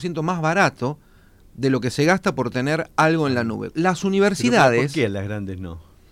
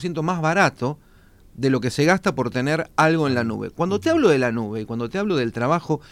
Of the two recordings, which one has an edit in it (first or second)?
first